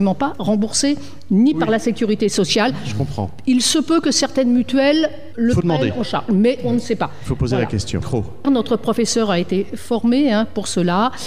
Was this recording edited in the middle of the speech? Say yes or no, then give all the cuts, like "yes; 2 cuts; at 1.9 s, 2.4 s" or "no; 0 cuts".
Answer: yes; 1 cut; at 8.4 s